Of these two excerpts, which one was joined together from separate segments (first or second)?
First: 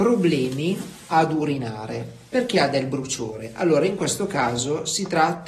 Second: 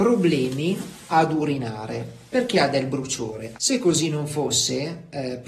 second